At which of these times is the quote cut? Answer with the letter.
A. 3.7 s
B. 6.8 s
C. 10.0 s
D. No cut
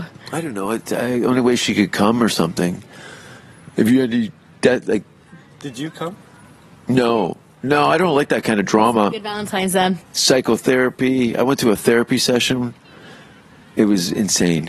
C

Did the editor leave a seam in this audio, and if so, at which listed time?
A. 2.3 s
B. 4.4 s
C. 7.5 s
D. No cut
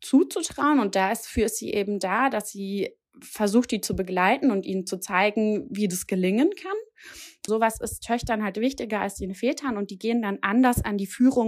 C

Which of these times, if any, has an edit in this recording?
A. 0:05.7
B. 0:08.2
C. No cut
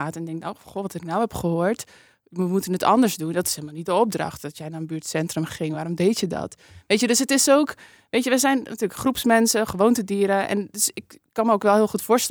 C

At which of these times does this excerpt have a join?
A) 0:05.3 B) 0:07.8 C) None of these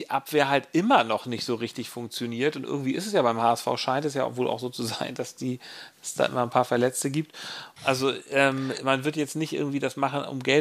B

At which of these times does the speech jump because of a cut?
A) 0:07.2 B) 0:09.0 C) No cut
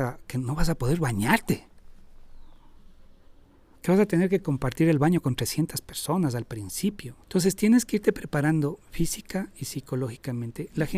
A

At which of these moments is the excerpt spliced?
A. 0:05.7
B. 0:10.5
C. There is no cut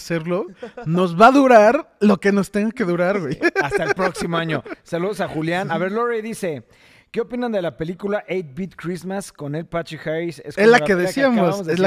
C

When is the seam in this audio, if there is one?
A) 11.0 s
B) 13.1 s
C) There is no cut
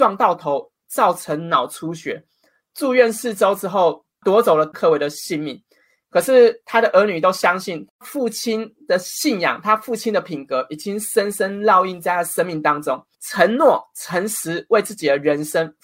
B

